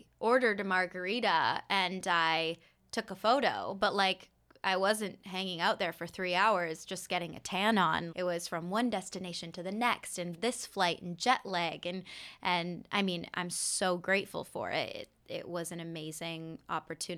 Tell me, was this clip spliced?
yes; 1 cut; at 8.1 s

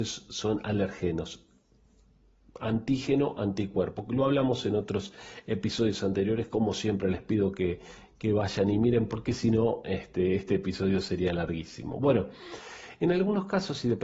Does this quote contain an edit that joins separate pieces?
no; 0 cuts

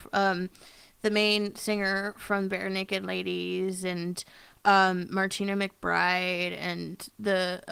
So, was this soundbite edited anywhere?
no; 0 cuts

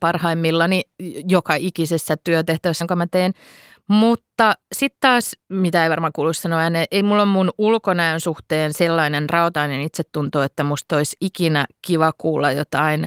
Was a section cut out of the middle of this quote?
yes; 1 cut; at 2.8 s

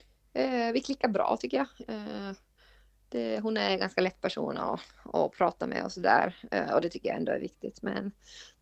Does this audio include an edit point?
no; 0 cuts

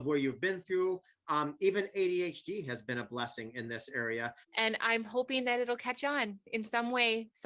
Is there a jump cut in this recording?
yes; 1 cut; at 4.4 s

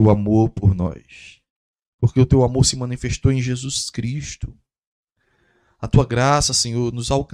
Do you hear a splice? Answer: no; 0 cuts

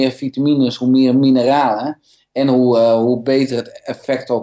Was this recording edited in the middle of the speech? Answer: no; 0 cuts

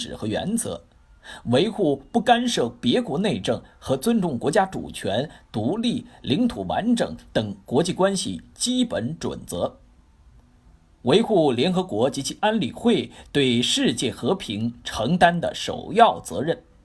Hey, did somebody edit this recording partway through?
no; 0 cuts

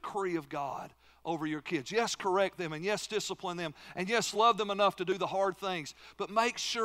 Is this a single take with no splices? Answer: yes; 0 cuts

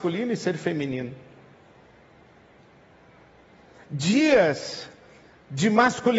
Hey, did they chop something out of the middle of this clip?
no; 0 cuts

